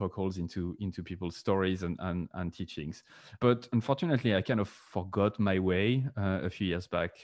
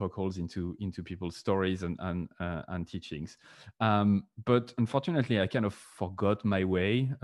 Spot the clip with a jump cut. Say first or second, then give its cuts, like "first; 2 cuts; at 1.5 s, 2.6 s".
first; 2 cuts; at 2.3 s, 3.4 s